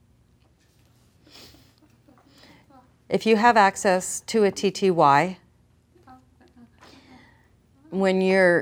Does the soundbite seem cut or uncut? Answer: uncut